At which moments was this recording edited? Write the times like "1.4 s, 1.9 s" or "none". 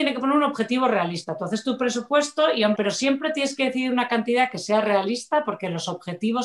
2.7 s